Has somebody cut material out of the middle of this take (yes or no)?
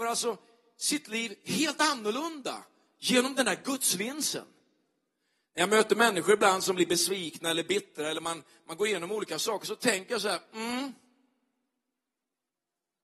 no